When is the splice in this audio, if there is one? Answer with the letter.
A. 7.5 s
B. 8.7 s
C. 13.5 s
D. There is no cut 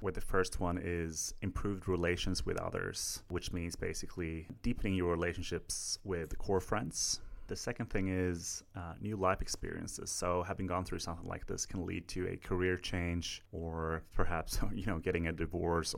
C